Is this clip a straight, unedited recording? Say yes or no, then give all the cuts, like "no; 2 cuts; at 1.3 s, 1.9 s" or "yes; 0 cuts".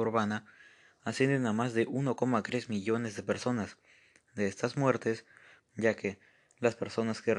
no; 1 cut; at 5.6 s